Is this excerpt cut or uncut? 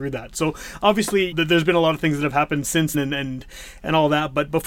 cut